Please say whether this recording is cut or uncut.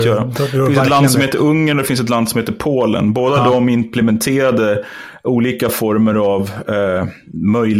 uncut